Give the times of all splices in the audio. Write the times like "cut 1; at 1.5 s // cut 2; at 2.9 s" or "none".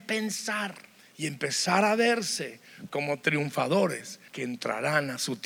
cut 1; at 4.3 s